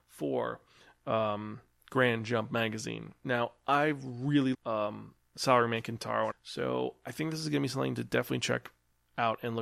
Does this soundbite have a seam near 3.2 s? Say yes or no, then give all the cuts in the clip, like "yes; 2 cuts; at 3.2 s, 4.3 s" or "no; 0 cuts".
no; 2 cuts; at 4.5 s, 6.3 s